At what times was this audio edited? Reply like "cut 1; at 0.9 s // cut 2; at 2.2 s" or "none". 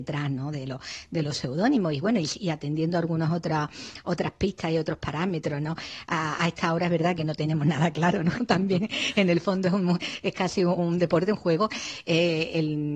cut 1; at 8.4 s // cut 2; at 10.8 s